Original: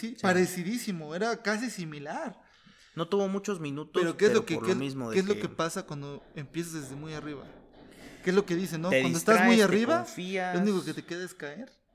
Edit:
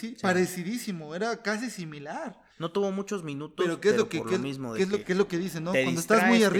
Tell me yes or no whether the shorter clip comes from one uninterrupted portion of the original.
no